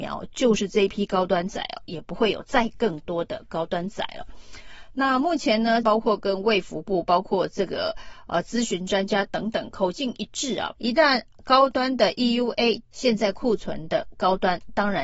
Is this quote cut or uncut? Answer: cut